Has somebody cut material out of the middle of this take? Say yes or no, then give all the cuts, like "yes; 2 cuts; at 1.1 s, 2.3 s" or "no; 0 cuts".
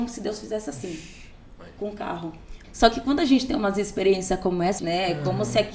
yes; 2 cuts; at 2.6 s, 4.8 s